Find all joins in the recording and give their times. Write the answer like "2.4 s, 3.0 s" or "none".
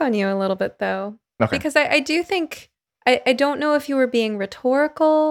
none